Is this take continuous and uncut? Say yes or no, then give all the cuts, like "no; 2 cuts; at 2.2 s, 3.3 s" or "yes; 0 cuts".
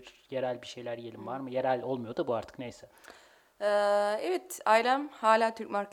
yes; 0 cuts